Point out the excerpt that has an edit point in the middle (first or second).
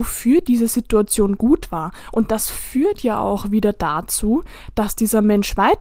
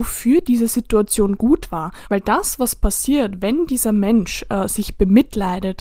second